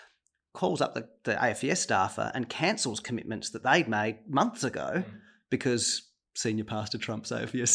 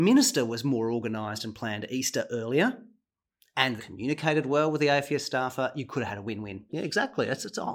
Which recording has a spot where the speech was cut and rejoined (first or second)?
second